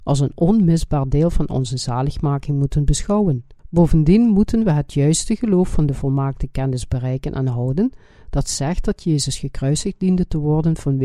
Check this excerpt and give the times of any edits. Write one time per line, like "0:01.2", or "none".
0:03.6